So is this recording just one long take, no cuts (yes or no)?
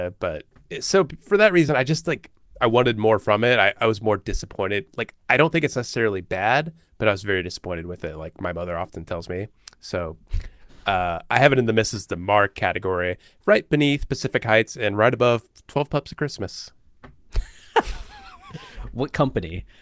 yes